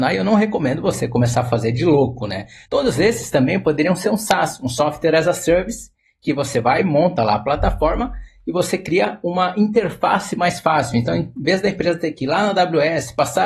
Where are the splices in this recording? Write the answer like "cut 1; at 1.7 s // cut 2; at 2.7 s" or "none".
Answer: cut 1; at 2.7 s